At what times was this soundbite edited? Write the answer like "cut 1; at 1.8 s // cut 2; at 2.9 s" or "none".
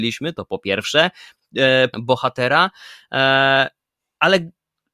cut 1; at 1.9 s